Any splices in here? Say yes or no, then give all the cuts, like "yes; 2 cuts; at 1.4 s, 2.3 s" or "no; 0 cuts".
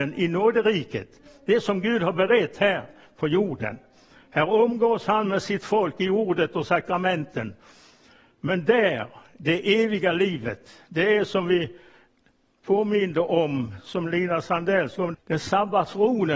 yes; 1 cut; at 15.1 s